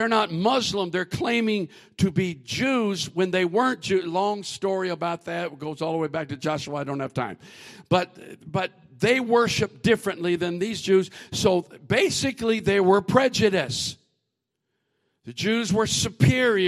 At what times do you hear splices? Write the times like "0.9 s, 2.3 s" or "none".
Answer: none

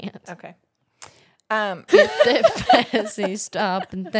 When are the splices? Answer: 1.9 s

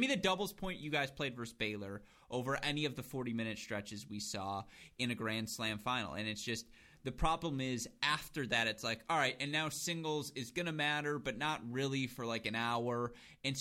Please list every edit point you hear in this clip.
none

